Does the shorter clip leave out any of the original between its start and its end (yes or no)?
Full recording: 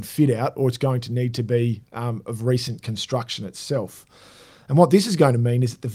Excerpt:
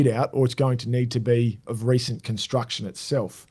yes